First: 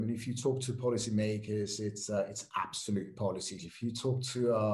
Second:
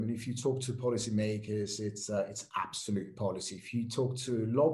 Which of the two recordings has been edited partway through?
first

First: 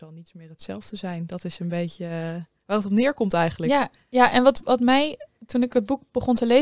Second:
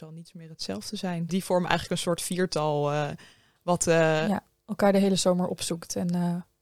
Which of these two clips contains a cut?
second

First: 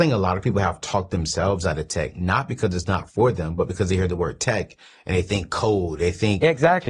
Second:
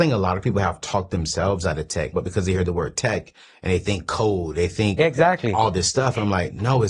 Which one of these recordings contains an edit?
second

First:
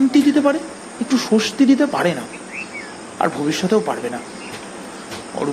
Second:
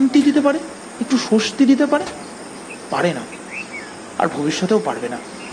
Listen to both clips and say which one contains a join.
first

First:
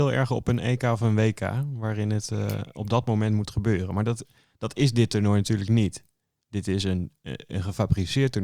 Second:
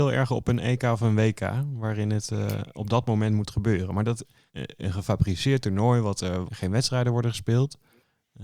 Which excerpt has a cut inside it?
second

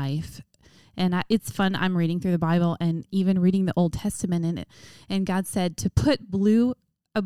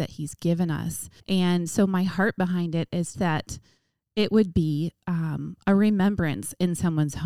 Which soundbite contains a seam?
second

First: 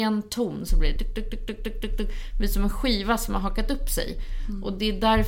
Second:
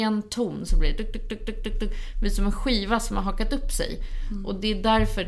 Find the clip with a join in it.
second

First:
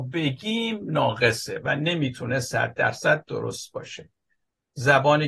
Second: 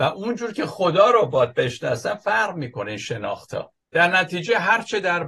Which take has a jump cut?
second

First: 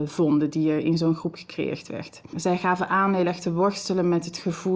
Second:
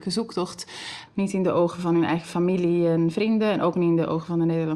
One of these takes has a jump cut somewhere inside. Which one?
second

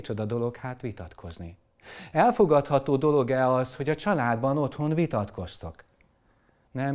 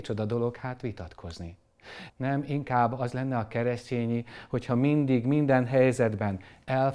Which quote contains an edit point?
second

